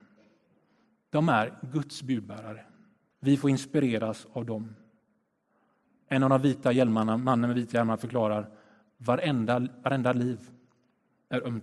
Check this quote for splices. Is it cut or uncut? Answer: cut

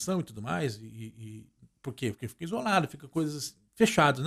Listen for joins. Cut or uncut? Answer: uncut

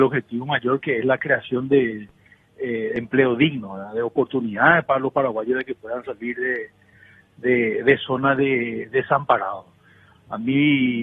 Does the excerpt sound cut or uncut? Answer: uncut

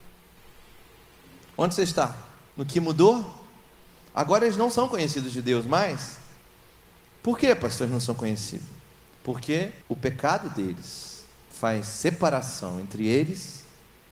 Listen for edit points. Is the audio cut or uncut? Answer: cut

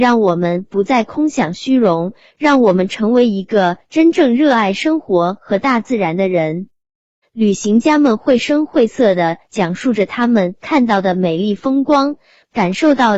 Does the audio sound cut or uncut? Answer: cut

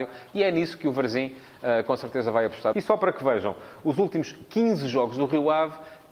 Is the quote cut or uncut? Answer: cut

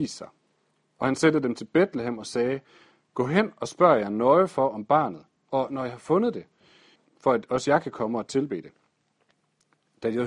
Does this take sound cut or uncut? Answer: cut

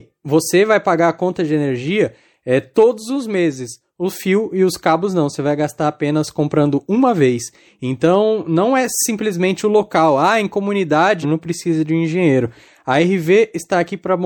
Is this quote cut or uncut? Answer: cut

